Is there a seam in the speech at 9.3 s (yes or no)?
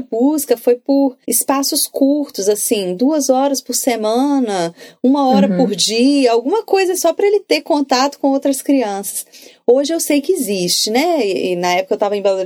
no